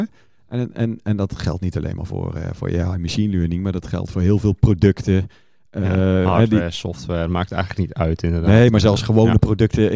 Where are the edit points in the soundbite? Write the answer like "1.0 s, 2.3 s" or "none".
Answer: none